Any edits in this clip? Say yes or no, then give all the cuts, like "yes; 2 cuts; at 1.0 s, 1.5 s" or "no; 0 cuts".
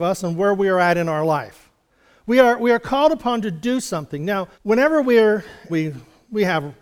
yes; 2 cuts; at 4.5 s, 5.7 s